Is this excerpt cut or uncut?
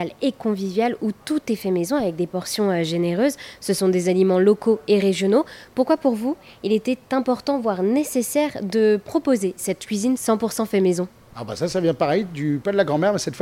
uncut